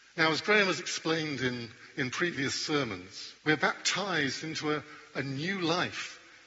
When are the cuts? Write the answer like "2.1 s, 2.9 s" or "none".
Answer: 3.4 s

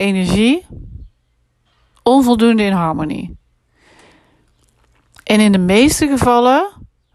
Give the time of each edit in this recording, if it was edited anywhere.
none

